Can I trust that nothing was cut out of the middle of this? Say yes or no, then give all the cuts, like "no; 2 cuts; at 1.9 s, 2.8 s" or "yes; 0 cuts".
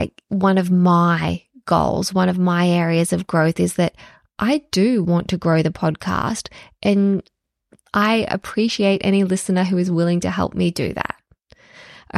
yes; 0 cuts